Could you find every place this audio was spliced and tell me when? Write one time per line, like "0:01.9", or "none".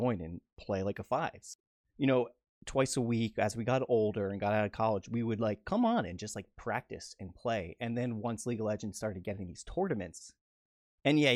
none